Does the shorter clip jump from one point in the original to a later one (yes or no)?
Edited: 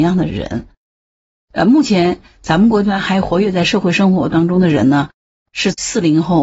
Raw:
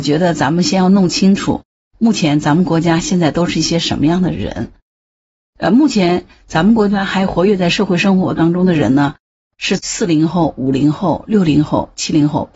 no